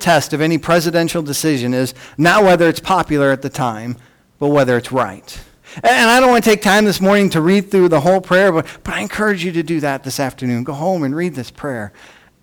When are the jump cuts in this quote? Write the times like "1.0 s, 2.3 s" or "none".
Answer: 5.6 s